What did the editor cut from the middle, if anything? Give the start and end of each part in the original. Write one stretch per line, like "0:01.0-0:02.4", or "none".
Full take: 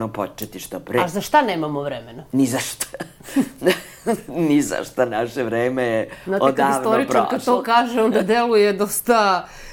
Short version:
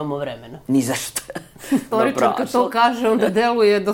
0:03.6-0:06.8